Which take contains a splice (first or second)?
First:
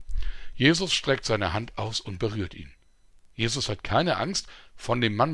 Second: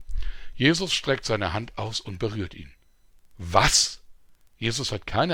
first